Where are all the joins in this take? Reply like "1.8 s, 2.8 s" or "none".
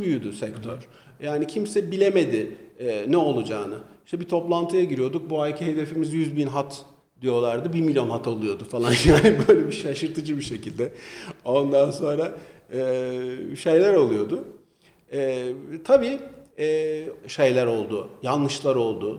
17.2 s